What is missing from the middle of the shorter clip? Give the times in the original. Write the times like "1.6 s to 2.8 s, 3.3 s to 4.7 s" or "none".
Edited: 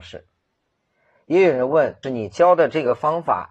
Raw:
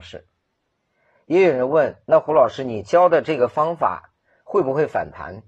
2.0 s to 2.6 s